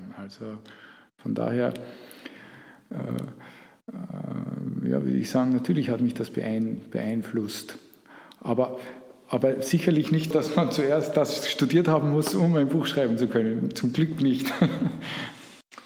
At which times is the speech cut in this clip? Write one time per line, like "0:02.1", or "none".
0:10.3